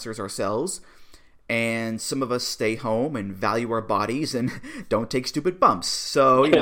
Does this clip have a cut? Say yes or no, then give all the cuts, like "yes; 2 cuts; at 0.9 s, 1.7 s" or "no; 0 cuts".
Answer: no; 0 cuts